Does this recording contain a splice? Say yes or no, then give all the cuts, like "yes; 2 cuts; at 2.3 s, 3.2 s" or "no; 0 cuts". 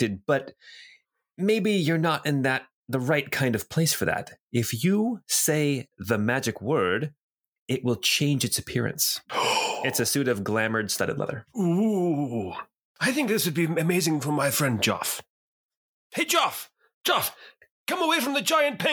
no; 0 cuts